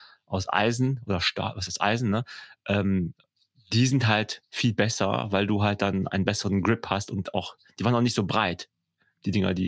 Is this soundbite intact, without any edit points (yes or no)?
yes